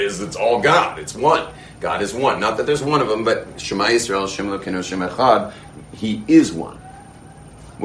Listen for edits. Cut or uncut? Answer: uncut